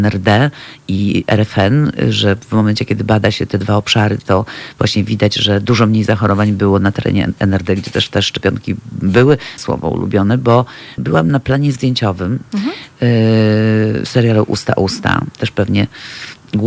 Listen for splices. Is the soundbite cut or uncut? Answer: cut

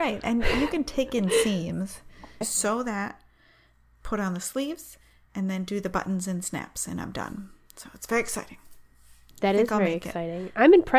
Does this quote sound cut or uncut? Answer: cut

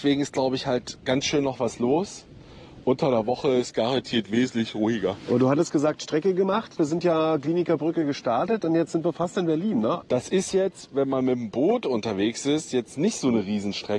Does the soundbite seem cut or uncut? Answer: cut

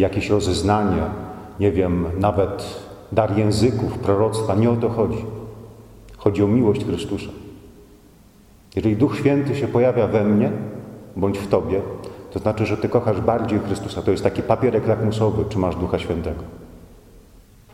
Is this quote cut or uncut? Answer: uncut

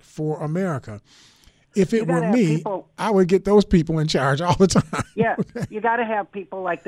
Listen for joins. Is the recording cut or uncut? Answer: uncut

